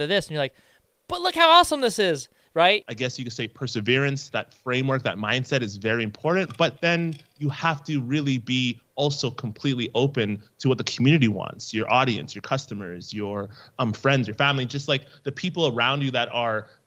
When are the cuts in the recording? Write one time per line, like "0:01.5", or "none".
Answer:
0:02.8